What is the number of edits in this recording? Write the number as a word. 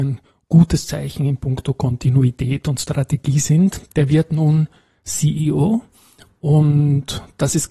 one